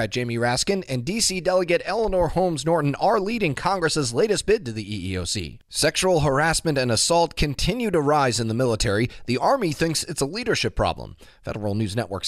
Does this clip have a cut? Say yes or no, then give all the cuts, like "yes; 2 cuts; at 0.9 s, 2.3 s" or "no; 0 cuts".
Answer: yes; 1 cut; at 5.6 s